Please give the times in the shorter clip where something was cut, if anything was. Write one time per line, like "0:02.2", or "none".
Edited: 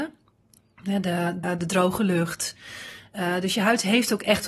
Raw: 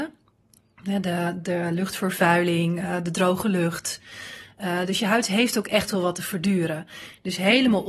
0:01.4